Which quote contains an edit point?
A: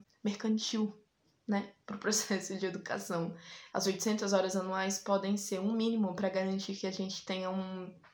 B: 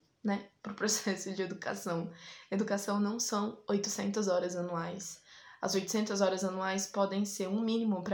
A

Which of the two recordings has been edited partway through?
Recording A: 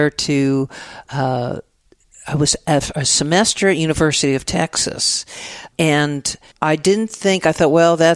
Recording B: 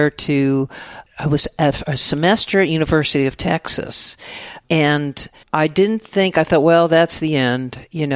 B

